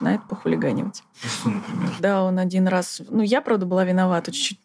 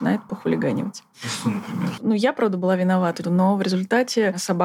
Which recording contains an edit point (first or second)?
second